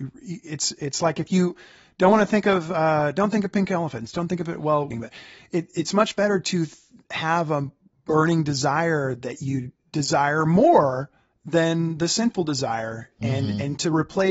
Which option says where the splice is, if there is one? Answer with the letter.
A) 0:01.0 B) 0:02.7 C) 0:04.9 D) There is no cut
C